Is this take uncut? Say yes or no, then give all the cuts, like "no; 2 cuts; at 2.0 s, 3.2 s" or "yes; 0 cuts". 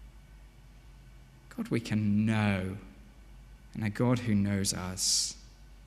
yes; 0 cuts